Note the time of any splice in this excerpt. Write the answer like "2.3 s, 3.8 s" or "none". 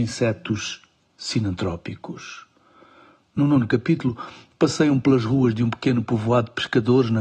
none